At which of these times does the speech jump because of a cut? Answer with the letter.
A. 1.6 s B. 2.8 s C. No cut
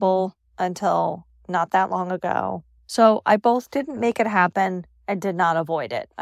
B